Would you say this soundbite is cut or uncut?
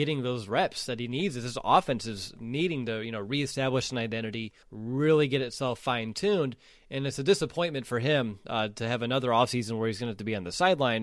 cut